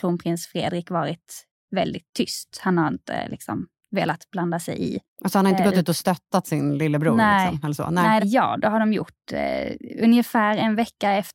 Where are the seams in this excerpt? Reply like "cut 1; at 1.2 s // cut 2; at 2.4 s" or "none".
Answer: cut 1; at 8.2 s